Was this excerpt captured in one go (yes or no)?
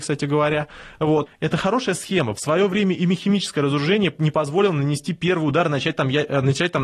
no